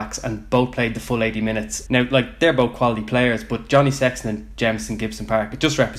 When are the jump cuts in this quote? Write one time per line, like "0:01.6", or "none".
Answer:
0:01.9